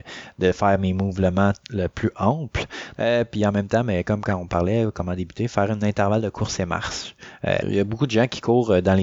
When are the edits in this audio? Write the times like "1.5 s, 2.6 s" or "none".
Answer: 3.0 s, 7.6 s